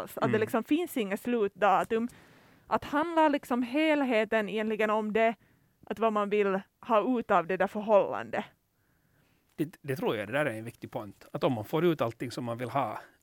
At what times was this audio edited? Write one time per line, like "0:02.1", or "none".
none